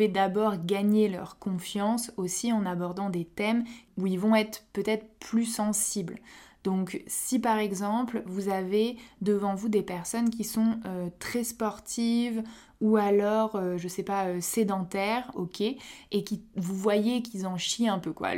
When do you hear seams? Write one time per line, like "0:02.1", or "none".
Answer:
0:15.3

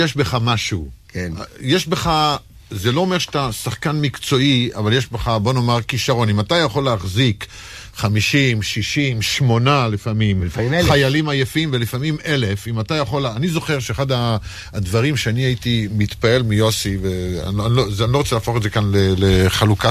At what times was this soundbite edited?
none

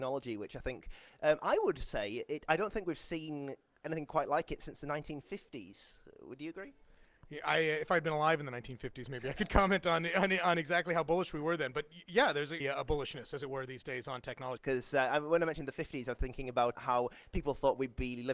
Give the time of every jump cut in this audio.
0:12.6
0:14.6
0:16.8

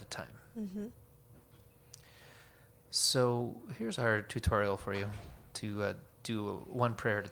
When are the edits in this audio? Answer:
none

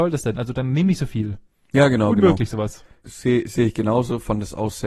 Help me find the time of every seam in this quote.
0:03.0

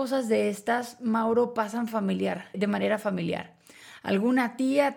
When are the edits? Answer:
0:02.5

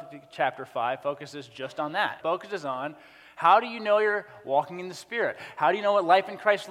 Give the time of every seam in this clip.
0:02.2

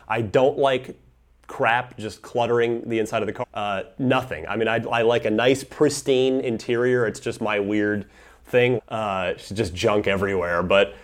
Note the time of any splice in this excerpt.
0:03.4
0:08.8

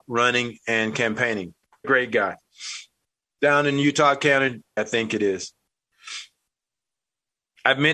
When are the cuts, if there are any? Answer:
0:01.8
0:04.8

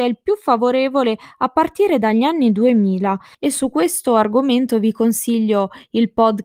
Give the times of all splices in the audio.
0:03.3

